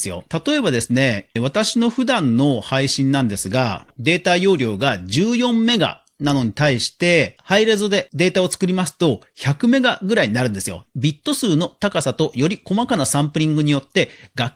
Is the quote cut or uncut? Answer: cut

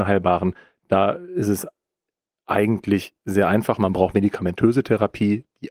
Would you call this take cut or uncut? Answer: uncut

